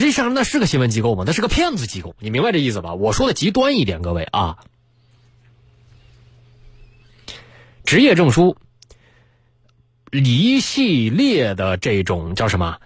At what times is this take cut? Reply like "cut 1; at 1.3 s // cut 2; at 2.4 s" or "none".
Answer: none

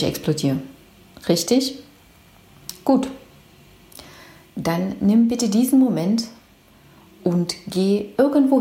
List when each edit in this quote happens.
none

